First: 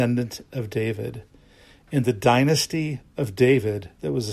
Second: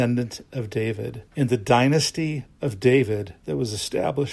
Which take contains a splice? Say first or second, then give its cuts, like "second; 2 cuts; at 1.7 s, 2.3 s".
second; 1 cut; at 1.3 s